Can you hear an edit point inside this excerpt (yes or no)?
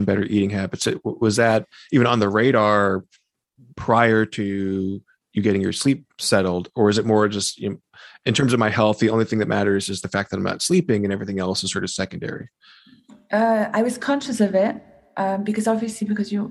no